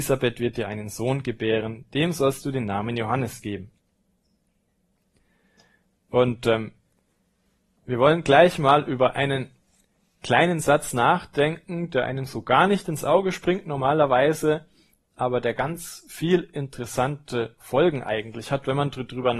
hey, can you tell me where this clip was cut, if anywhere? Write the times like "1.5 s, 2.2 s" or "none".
none